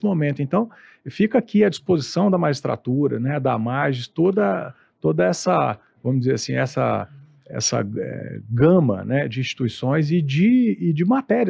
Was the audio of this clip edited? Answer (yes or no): no